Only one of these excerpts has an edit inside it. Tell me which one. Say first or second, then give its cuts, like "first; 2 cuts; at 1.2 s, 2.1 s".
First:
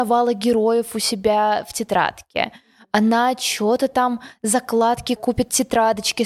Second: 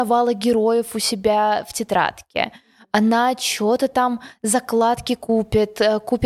first; 1 cut; at 5.2 s